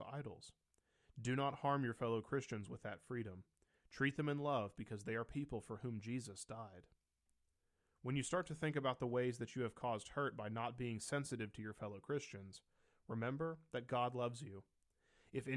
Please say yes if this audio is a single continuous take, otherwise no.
no